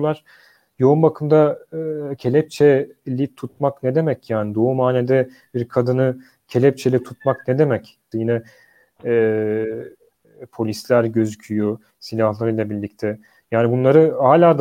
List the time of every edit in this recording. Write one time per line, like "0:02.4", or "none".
0:08.1
0:10.2

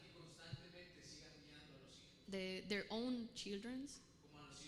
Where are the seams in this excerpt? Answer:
0:02.3

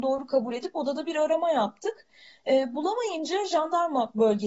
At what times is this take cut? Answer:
none

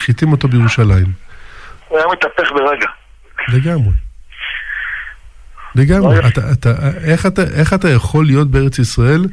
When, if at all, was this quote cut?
0:01.8
0:06.2

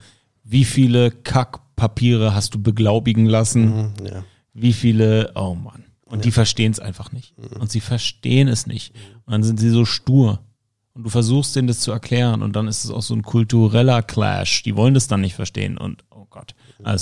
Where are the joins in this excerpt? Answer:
none

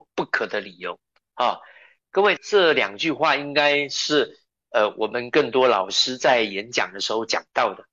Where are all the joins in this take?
0:02.4

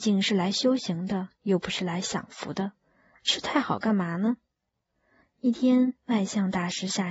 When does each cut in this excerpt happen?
0:05.2

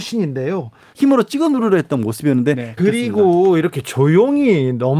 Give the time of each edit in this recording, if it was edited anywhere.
0:00.9
0:02.8

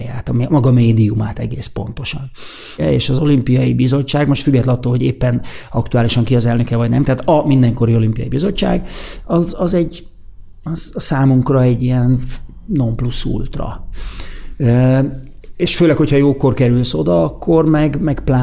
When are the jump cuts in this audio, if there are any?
0:02.8

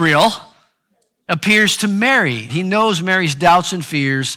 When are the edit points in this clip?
0:02.5

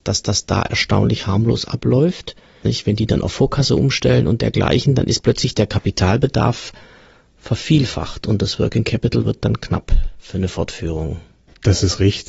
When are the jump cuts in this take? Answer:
0:02.6

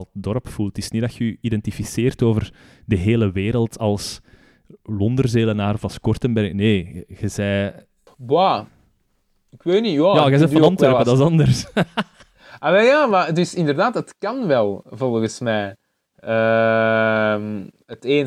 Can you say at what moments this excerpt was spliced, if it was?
none

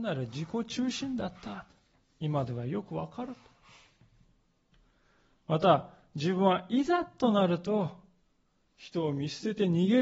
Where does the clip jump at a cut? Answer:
none

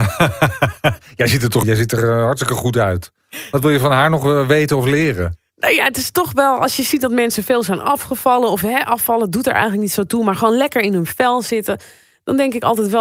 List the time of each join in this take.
0:01.6

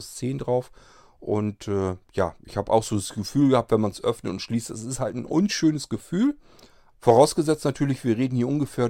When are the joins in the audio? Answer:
0:06.9

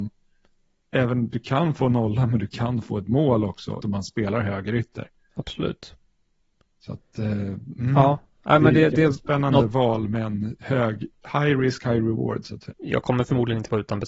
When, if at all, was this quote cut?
0:03.8
0:12.7

